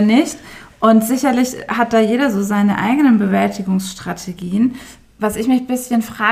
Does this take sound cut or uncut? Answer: uncut